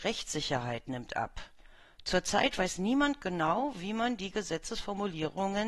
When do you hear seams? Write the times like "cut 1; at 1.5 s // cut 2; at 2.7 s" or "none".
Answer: none